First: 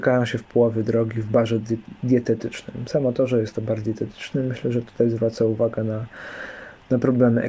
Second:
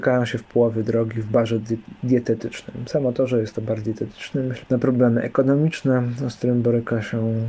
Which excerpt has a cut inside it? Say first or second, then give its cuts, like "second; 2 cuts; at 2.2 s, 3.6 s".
second; 1 cut; at 4.6 s